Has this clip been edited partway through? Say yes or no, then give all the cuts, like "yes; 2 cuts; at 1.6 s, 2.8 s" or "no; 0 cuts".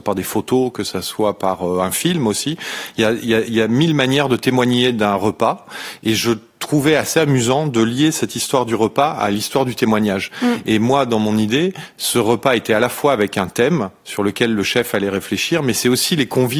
no; 0 cuts